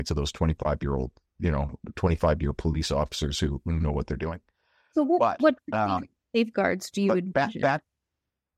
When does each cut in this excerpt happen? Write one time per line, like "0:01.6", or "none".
none